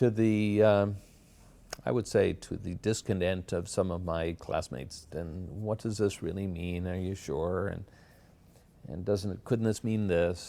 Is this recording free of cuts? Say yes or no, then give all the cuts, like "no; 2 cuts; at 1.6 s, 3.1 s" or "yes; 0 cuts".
no; 1 cut; at 5.1 s